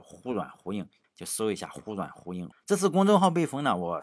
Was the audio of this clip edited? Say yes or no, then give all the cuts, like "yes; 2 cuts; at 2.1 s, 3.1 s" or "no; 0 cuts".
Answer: yes; 2 cuts; at 1.0 s, 2.5 s